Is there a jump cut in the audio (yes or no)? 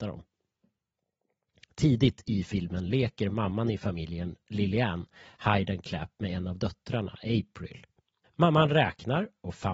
no